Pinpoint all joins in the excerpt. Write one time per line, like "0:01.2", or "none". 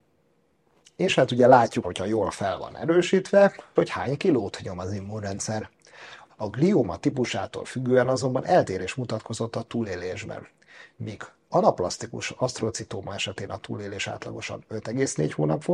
0:01.8
0:03.8
0:06.3